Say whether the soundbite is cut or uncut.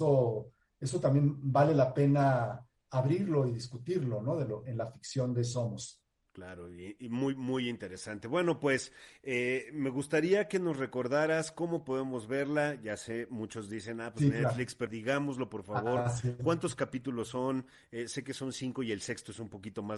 cut